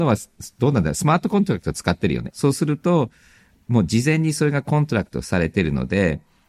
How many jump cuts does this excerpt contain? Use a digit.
1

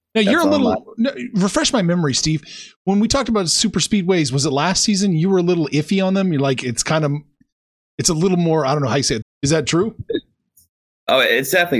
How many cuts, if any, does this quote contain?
1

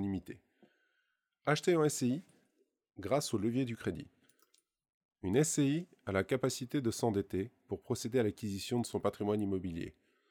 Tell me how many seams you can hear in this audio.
0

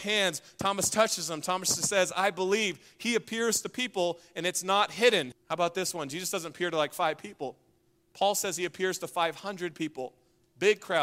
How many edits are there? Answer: 1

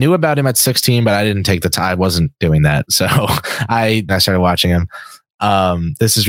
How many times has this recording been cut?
1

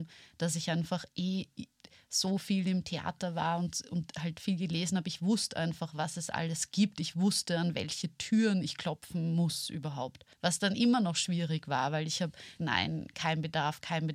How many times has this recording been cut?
2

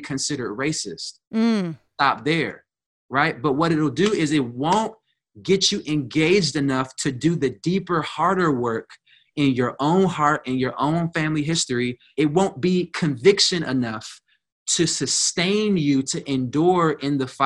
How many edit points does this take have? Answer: 0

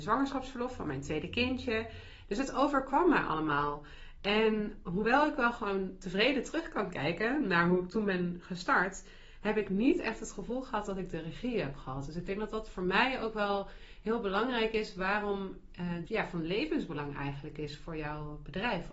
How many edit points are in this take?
2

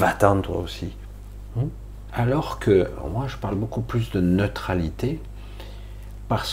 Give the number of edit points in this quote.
1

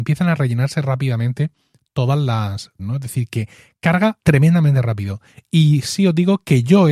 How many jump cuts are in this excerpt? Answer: 2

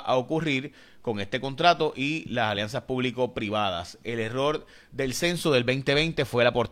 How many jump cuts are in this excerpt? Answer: 0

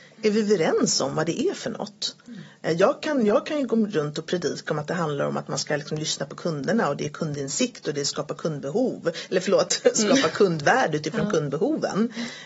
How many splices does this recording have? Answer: 0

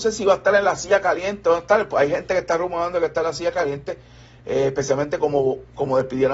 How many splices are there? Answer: 0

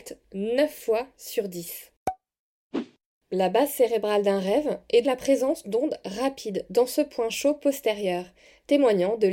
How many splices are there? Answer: 1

